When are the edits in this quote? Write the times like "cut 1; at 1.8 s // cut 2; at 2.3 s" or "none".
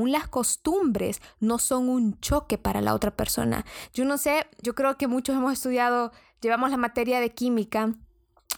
cut 1; at 4.6 s